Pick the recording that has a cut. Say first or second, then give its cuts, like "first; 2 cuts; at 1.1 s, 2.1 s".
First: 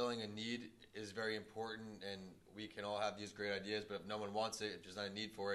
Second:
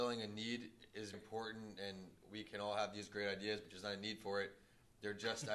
second; 2 cuts; at 1.1 s, 3.6 s